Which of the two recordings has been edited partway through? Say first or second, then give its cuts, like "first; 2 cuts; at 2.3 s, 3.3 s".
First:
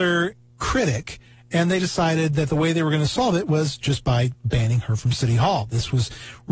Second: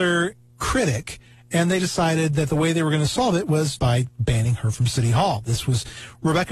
second; 1 cut; at 3.8 s